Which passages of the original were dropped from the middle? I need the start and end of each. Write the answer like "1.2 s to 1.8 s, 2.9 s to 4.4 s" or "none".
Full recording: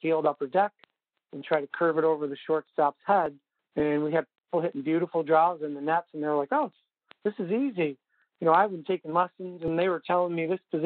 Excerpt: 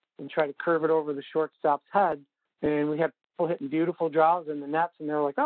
none